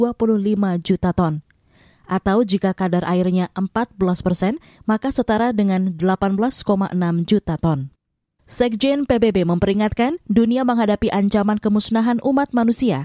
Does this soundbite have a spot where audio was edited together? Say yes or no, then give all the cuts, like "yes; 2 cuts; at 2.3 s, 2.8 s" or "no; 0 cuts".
yes; 1 cut; at 8.4 s